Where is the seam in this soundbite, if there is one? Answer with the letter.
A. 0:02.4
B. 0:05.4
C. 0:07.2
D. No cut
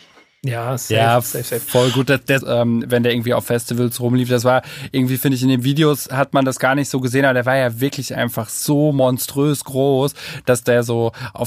A